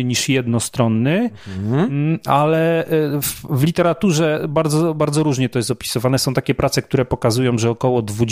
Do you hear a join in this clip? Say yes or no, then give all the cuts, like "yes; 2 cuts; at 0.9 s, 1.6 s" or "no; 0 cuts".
no; 0 cuts